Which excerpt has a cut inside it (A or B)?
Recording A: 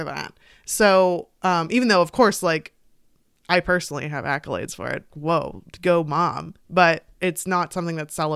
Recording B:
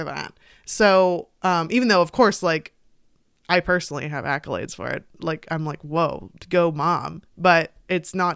A